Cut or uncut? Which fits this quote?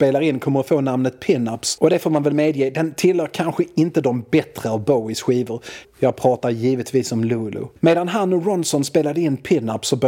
cut